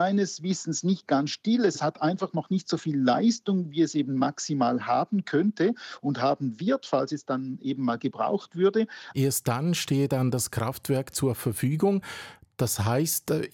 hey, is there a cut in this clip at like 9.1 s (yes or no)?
yes